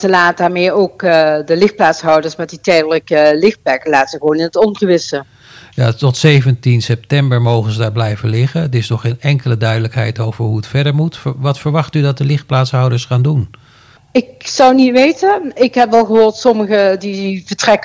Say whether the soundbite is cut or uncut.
uncut